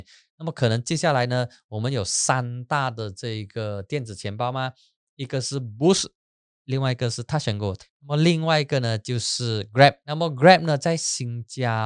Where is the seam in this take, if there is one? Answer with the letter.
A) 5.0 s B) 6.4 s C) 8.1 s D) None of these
D